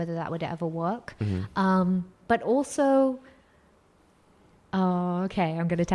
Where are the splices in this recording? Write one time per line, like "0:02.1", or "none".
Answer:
none